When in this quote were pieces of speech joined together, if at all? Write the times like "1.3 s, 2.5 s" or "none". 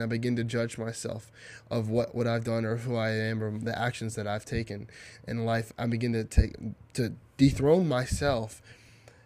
5.8 s